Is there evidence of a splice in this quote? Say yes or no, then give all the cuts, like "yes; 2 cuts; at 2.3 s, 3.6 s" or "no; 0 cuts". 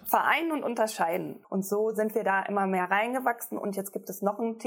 yes; 1 cut; at 1.4 s